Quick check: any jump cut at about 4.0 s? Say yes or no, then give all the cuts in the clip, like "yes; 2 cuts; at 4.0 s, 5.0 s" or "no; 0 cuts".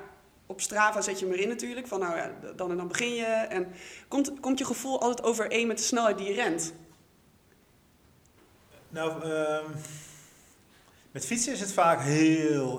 no; 0 cuts